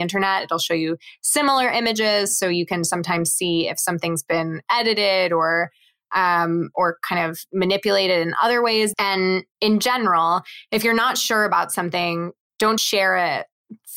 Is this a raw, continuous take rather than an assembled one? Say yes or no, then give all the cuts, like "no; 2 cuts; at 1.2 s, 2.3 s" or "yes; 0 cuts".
no; 2 cuts; at 8.9 s, 12.8 s